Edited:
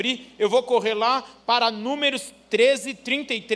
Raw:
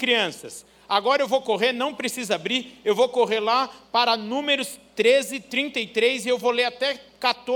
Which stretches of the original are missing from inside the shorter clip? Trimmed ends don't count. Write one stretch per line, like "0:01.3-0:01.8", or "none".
none